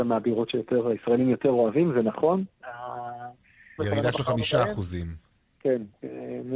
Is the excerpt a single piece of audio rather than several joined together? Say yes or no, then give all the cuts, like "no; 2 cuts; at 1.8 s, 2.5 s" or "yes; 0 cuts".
no; 1 cut; at 3.8 s